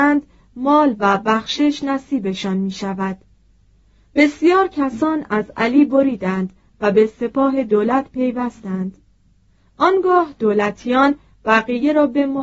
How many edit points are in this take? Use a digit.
0